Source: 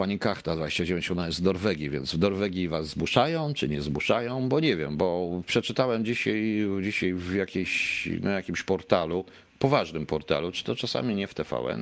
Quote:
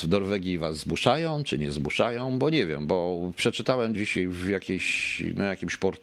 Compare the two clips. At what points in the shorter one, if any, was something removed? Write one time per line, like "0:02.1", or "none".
0:03.9

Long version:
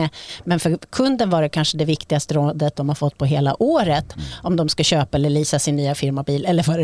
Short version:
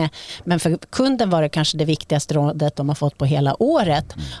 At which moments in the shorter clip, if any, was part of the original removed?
none

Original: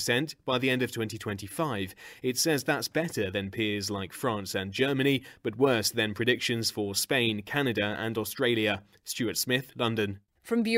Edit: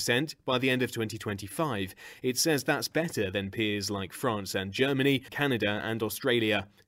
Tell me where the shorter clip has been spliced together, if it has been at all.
0:05.3

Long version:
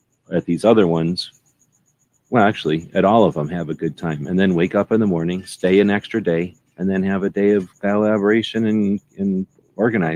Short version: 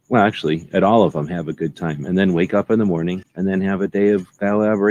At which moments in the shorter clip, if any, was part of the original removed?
0:03.2

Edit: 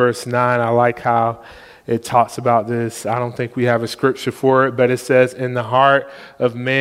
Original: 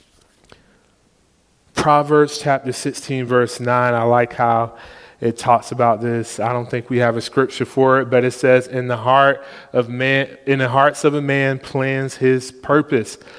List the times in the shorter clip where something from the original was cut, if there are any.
none

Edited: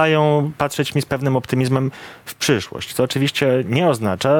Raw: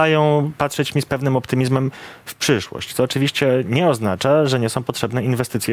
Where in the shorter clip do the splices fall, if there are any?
none

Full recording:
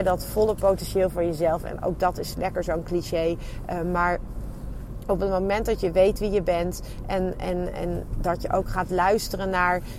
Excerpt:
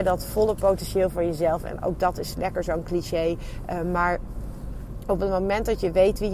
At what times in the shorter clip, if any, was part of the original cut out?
none

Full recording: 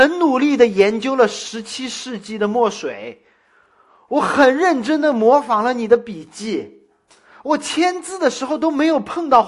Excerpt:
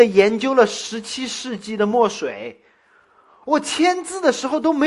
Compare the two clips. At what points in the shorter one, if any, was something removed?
0:03.4

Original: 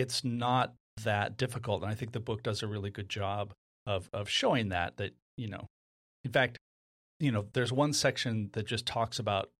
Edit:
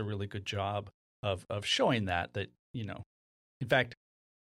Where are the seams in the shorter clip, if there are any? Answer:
none

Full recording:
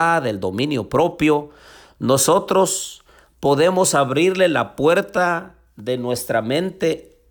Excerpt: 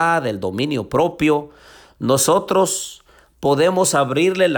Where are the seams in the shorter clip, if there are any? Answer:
none

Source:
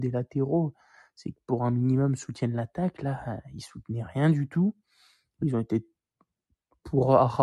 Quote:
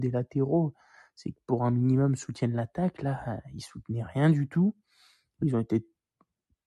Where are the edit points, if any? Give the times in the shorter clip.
none

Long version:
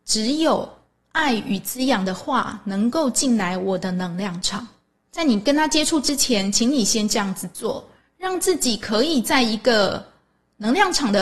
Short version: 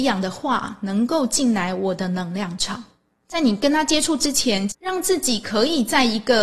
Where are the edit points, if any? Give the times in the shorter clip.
0:04.7

